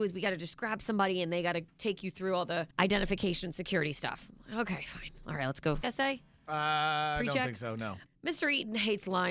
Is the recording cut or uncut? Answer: cut